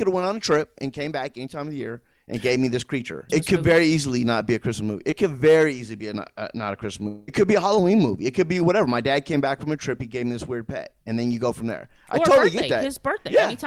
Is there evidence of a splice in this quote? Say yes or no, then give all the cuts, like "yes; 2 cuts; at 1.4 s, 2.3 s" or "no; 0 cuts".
yes; 1 cut; at 3.3 s